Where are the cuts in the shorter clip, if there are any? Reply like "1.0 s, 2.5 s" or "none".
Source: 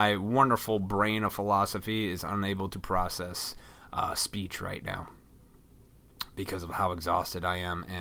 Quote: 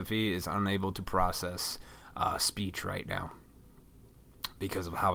none